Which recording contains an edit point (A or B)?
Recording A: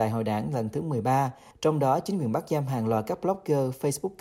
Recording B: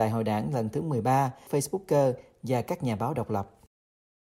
B